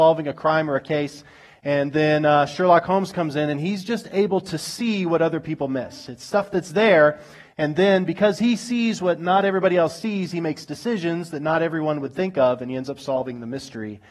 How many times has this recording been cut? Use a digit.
0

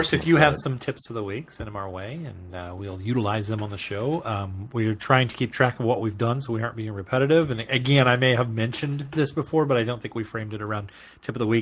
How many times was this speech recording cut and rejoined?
0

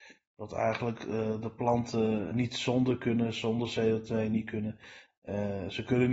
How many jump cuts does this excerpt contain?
1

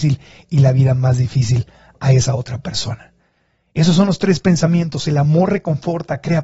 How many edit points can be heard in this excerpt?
0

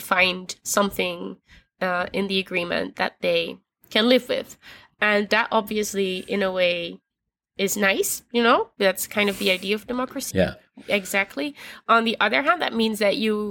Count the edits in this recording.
1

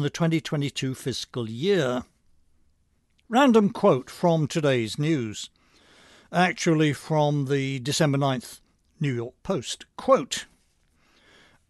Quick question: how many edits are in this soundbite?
1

